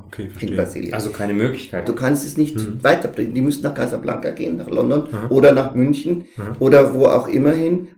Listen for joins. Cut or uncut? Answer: cut